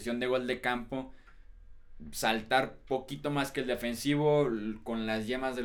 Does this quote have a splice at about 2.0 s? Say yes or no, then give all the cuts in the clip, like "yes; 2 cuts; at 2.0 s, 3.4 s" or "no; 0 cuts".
no; 0 cuts